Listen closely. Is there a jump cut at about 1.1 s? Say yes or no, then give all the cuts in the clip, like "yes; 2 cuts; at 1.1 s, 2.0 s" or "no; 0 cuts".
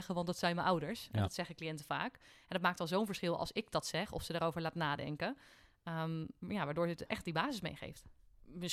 no; 0 cuts